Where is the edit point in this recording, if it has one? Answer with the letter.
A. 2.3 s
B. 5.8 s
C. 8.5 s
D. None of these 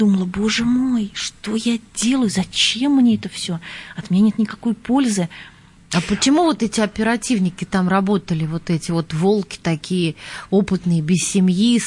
B